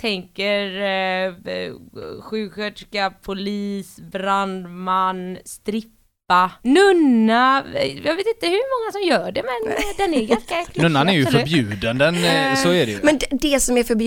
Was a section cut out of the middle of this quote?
yes; 1 cut; at 6.6 s

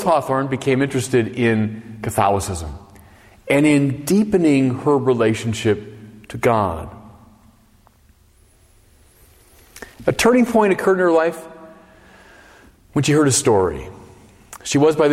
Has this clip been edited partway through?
no; 0 cuts

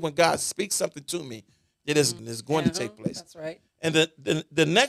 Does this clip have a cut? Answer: yes; 1 cut; at 2.2 s

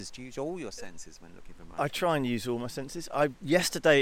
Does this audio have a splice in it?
no; 0 cuts

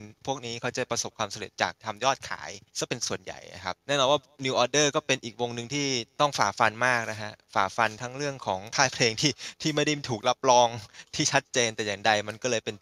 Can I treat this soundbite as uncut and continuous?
no; 1 cut; at 2.7 s

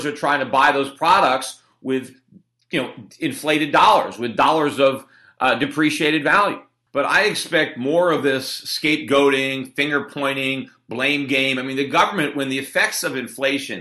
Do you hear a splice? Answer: no; 0 cuts

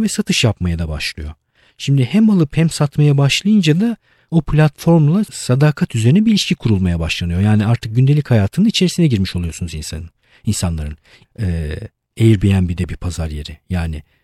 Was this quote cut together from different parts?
yes; 1 cut; at 11.2 s

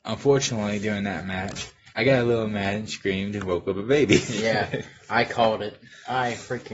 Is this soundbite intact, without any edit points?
no; 1 cut; at 1.9 s

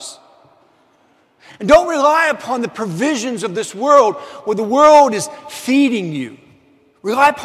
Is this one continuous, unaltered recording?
yes; 0 cuts

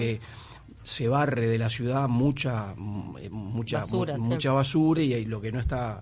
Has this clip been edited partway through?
yes; 1 cut; at 5.0 s

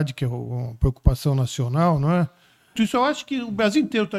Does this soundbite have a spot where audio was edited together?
yes; 1 cut; at 2.8 s

